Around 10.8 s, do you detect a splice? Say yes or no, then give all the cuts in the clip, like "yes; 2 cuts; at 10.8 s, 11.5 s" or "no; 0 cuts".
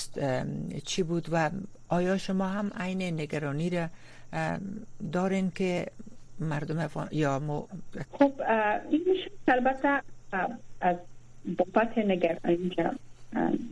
yes; 2 cuts; at 8.0 s, 10.8 s